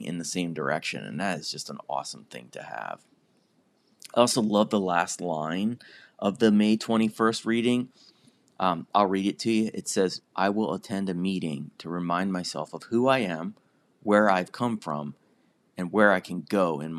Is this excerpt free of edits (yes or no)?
no